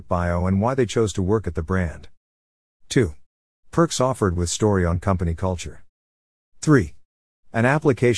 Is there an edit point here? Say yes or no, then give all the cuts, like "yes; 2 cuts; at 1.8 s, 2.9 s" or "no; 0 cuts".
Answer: no; 0 cuts